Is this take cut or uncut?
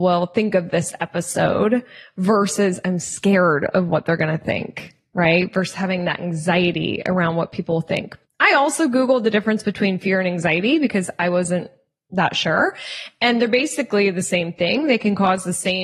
uncut